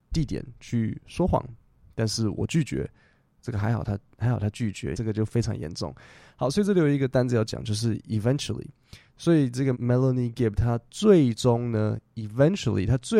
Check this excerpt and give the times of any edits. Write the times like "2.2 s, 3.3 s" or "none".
4.9 s, 9.7 s